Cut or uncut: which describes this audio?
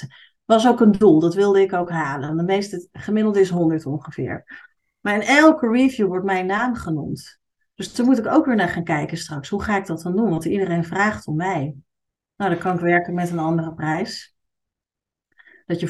uncut